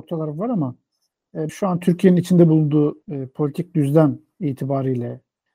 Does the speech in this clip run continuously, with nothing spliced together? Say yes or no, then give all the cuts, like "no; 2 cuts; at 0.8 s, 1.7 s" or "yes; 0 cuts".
no; 2 cuts; at 1.5 s, 3.0 s